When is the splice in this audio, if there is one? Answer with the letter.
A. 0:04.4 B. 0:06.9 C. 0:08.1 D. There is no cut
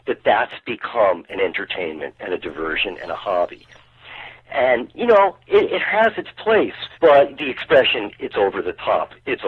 B